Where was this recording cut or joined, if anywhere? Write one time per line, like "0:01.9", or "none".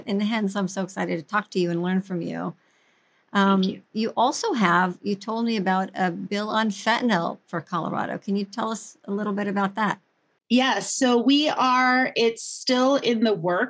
none